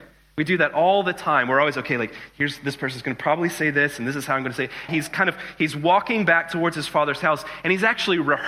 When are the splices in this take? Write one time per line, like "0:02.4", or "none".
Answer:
0:04.9